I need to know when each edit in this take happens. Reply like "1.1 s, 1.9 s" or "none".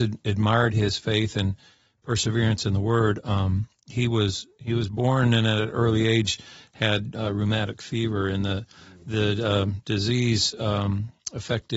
none